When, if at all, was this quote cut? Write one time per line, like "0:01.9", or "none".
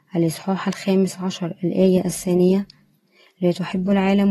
none